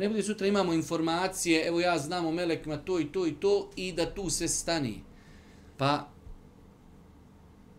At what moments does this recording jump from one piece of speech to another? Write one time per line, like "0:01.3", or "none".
0:05.7